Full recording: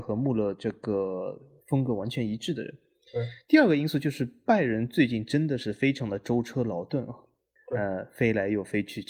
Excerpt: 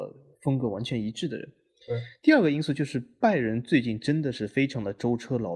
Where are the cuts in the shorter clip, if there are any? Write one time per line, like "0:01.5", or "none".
none